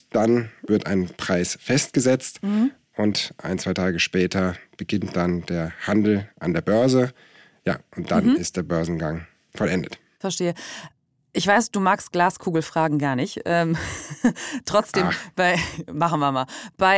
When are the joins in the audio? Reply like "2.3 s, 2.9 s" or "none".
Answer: none